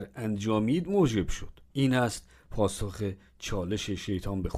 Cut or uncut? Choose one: cut